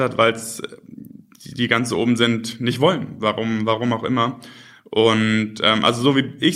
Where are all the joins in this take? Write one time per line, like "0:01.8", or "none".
none